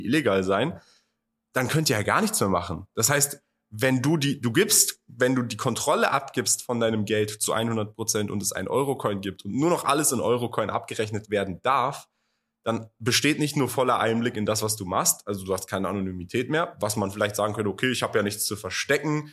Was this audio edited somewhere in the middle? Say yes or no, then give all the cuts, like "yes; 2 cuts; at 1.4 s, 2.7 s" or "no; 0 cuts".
no; 0 cuts